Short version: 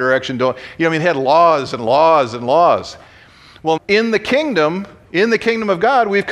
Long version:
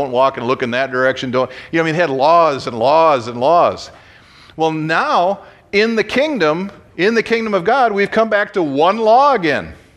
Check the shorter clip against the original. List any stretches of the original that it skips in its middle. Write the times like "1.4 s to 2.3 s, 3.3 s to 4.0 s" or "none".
4.7 s to 5.6 s